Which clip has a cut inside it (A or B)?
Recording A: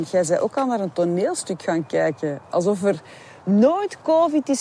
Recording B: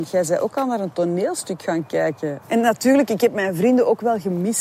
B